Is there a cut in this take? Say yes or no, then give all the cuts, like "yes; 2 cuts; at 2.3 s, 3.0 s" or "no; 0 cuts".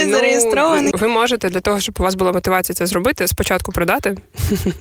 yes; 1 cut; at 0.9 s